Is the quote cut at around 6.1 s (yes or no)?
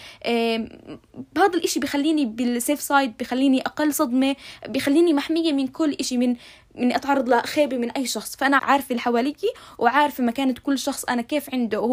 no